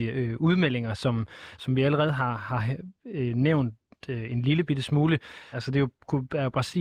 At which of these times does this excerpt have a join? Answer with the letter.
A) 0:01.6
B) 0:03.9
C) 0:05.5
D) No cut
C